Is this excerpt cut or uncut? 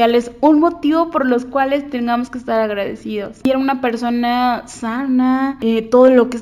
cut